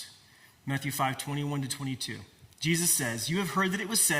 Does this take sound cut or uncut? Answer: uncut